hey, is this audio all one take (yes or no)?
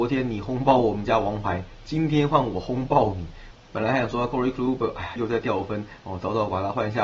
no